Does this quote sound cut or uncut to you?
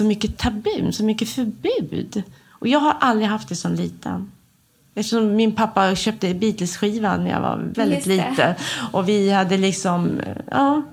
cut